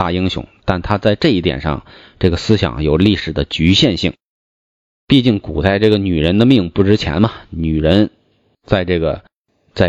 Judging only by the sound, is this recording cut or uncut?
uncut